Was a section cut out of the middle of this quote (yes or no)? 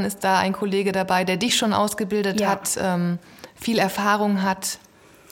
no